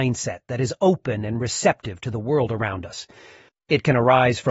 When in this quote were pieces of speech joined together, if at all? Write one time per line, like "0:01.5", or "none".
0:03.5

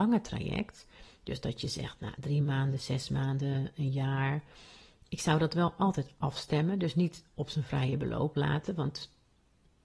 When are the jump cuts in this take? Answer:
none

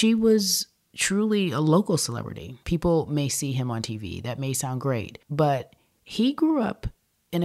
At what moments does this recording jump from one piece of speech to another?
0:02.6
0:05.2

